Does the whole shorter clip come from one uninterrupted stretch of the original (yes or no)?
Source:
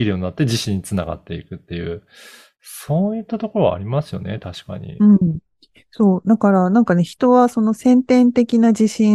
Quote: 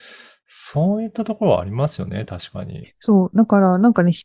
no